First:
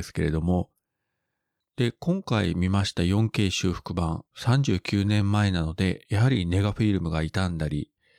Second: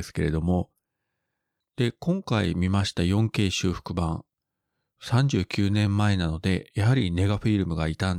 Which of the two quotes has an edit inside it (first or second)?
first